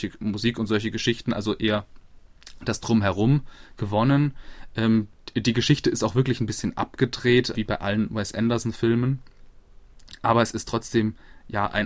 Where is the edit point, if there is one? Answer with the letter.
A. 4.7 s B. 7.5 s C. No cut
B